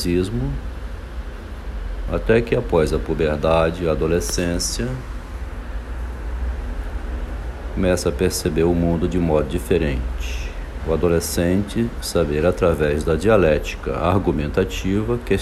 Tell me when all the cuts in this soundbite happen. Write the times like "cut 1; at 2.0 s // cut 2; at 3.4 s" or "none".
cut 1; at 10.8 s